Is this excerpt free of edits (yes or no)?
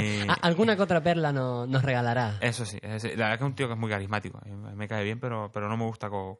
yes